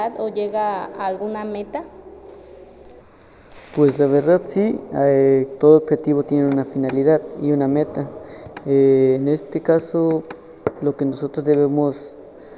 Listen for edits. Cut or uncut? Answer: uncut